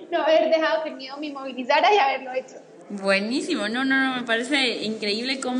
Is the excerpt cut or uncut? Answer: uncut